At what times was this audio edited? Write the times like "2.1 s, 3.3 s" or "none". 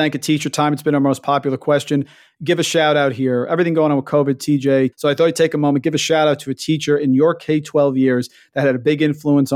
4.9 s